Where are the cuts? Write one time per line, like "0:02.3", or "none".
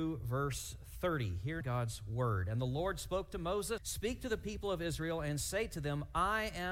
0:01.6
0:03.8